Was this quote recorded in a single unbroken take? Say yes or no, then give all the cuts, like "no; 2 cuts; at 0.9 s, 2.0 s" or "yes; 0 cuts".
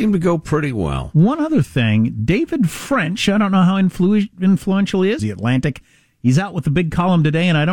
no; 1 cut; at 5.2 s